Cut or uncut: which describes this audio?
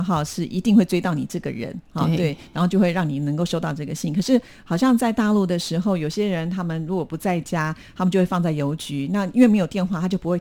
uncut